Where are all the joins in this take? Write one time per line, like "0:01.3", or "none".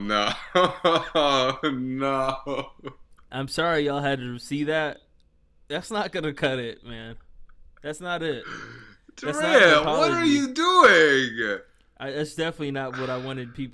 none